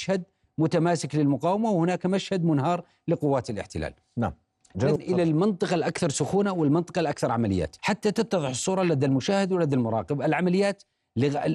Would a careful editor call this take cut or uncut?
cut